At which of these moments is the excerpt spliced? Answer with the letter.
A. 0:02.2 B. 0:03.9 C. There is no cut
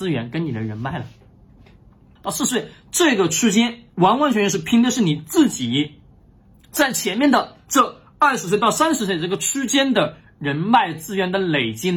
A